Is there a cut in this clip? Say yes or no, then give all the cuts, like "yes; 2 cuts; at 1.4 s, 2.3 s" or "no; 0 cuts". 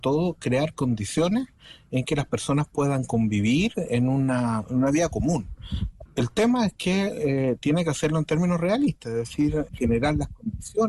yes; 2 cuts; at 6.1 s, 9.7 s